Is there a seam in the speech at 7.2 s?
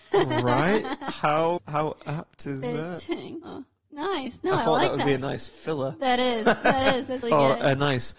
yes; 3 cuts; at 1.6 s, 3.4 s, 7.2 s

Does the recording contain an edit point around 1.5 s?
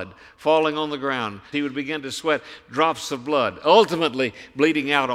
yes; 1 cut; at 1.5 s

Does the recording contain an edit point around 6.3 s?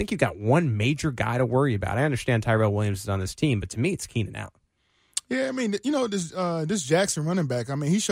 no; 0 cuts

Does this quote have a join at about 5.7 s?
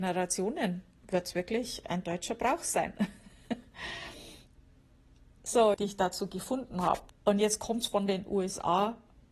yes; 2 cuts; at 5.7 s, 7.1 s

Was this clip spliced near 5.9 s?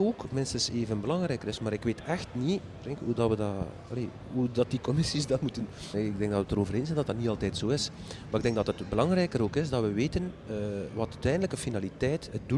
yes; 1 cut; at 5.9 s

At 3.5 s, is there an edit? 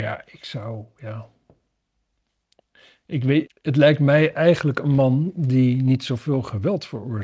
yes; 1 cut; at 3.5 s

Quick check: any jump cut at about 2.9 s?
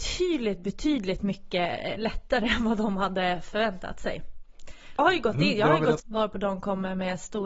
no; 2 cuts; at 5.0 s, 6.0 s

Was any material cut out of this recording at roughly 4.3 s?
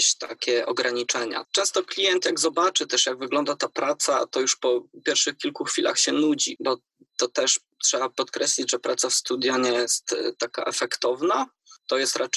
no; 2 cuts; at 1.4 s, 6.6 s

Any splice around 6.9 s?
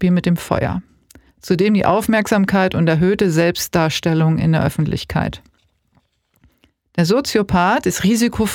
yes; 1 cut; at 6.9 s

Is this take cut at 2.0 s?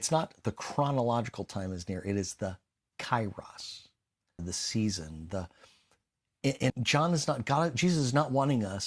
no; 2 cuts; at 4.4 s, 6.7 s

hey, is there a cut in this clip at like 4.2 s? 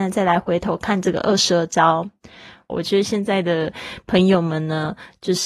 no; 1 cut; at 2.7 s

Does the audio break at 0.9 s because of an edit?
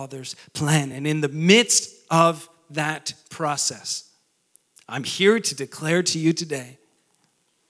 no; 0 cuts

